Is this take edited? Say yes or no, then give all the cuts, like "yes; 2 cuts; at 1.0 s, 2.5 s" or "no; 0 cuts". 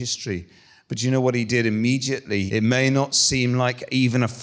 yes; 1 cut; at 2.5 s